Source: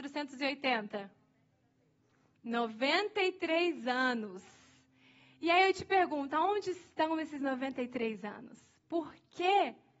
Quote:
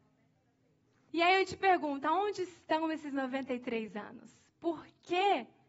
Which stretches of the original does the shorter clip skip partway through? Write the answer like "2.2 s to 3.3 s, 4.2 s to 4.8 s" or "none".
2.3 s to 5.4 s